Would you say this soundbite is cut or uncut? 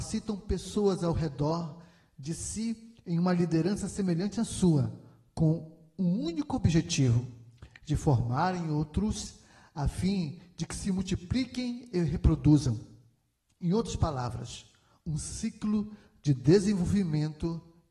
uncut